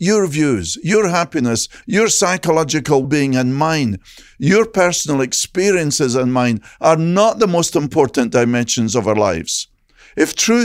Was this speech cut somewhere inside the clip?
yes; 2 cuts; at 1.8 s, 3.0 s

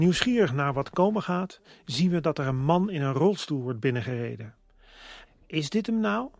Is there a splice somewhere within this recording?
yes; 1 cut; at 5.2 s

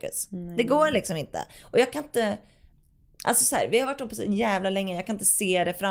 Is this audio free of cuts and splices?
yes; 0 cuts

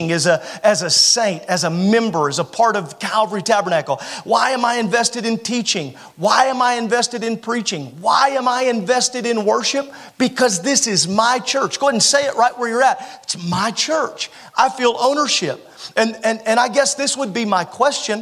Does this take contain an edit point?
no; 0 cuts

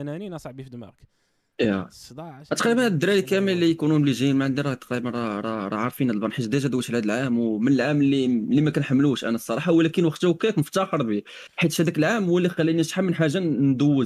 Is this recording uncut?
yes; 0 cuts

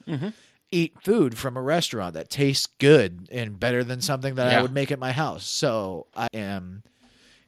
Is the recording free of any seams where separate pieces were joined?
no; 1 cut; at 6.3 s

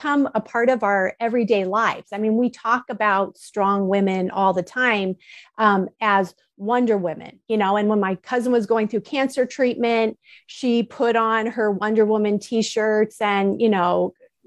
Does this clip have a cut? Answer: no; 0 cuts

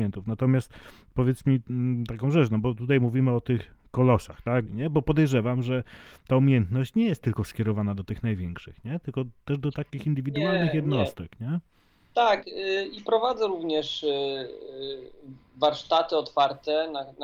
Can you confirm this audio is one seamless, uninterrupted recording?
no; 1 cut; at 4.7 s

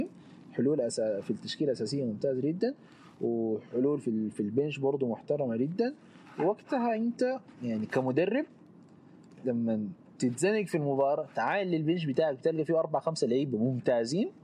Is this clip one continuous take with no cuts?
yes; 0 cuts

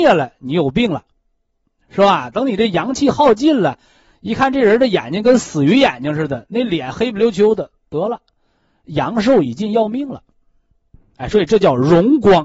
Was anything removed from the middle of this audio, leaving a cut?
no; 0 cuts

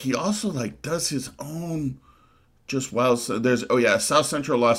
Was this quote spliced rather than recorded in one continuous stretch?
no; 0 cuts

